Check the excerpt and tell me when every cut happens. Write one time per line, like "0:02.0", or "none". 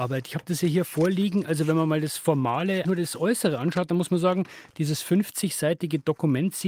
0:02.8